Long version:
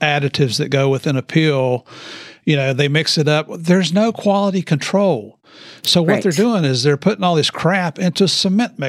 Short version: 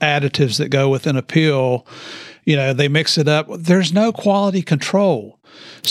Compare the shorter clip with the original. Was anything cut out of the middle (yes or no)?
no